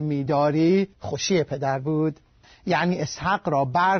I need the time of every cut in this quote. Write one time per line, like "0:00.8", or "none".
0:00.9